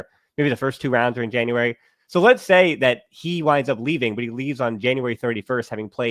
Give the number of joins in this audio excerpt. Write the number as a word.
zero